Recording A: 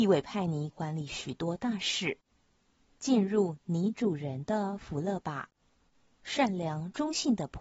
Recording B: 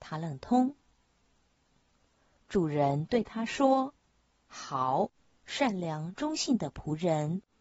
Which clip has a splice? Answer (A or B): A